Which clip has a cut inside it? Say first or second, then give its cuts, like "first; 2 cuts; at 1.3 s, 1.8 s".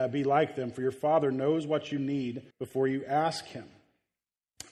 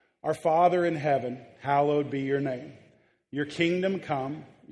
first; 1 cut; at 2.5 s